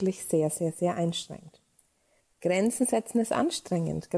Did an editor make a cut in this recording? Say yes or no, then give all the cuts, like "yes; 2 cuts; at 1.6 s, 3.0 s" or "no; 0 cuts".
yes; 1 cut; at 2.2 s